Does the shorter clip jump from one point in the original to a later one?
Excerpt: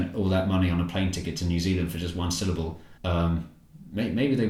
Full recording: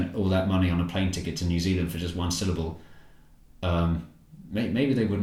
yes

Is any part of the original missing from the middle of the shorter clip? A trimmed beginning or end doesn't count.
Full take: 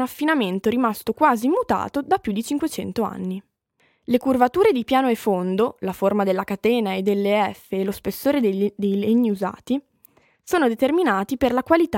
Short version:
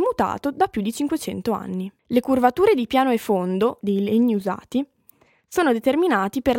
yes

